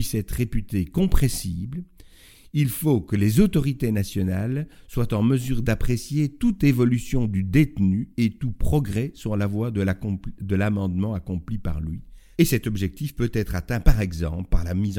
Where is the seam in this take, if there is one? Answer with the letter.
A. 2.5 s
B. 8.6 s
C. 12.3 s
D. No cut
C